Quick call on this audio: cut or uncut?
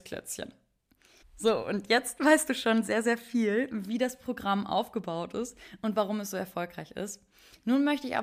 cut